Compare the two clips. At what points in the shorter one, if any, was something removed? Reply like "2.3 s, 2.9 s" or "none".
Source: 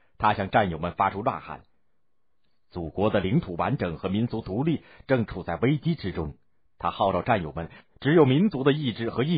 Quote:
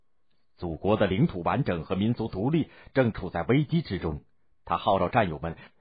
none

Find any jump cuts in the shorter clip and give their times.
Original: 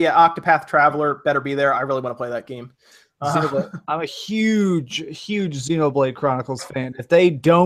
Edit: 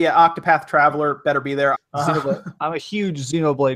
1.7 s, 2.8 s

